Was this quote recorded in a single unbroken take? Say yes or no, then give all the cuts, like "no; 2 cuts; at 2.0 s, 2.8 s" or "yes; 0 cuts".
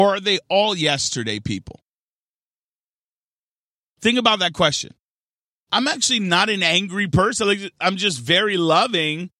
no; 1 cut; at 5.6 s